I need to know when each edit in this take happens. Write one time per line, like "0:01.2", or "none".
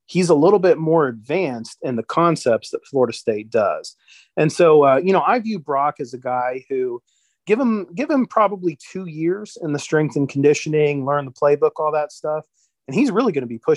none